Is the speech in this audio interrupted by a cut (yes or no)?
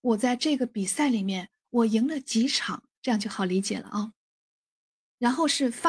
yes